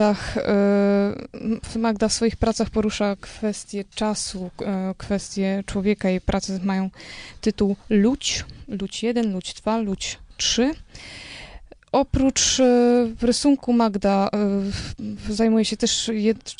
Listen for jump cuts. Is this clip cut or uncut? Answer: uncut